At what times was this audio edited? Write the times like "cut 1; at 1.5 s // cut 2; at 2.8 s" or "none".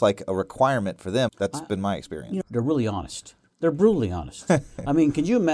cut 1; at 1.3 s // cut 2; at 2.4 s